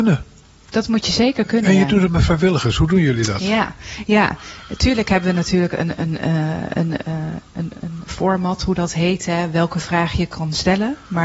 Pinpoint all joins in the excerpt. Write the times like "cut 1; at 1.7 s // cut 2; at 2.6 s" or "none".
none